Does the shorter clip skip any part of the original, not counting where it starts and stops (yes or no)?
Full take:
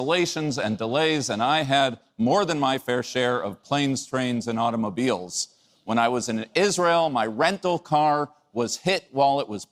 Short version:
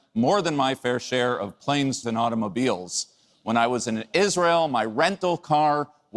yes